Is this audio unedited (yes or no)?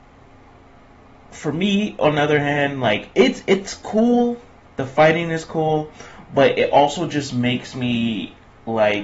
yes